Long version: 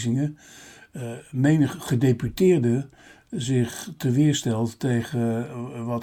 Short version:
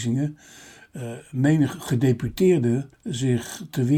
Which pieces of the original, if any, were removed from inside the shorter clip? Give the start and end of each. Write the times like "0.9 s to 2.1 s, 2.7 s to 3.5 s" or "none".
2.9 s to 3.2 s